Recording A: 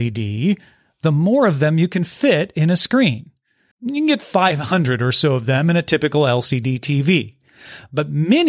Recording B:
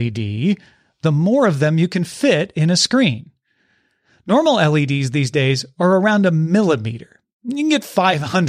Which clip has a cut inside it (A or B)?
A